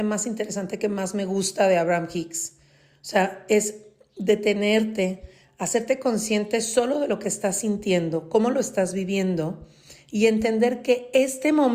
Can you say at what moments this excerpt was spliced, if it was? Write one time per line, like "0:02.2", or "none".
0:05.5